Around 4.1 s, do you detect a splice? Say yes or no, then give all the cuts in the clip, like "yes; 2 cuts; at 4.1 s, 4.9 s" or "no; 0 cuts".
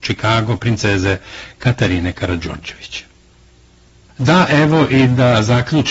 yes; 1 cut; at 4.1 s